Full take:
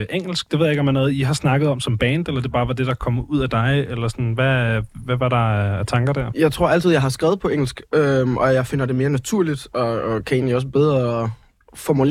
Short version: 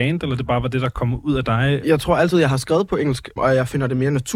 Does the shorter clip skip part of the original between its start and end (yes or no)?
yes